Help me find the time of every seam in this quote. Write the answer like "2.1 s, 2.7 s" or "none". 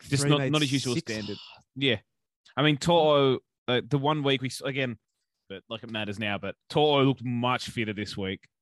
1.7 s, 5.5 s, 6.6 s

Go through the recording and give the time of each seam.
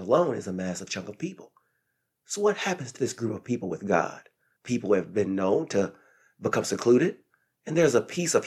3.0 s, 4.6 s

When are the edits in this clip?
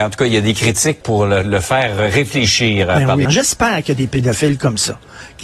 1.0 s, 3.3 s

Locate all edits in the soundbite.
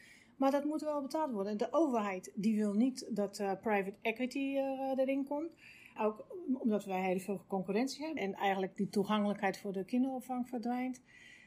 6.0 s, 8.2 s

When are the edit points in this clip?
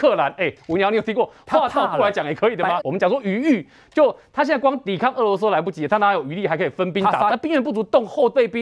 2.8 s, 7.3 s

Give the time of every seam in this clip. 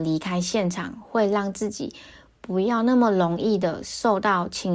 none

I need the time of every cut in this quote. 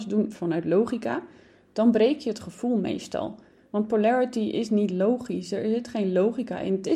none

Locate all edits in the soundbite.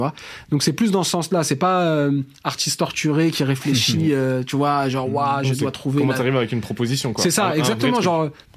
none

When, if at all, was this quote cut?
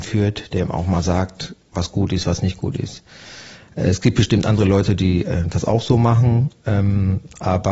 1.6 s

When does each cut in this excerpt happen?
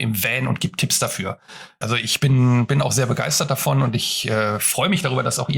1.8 s

